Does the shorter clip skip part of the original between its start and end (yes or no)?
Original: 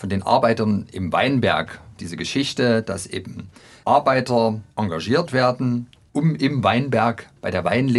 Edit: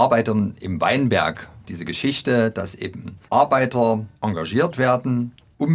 yes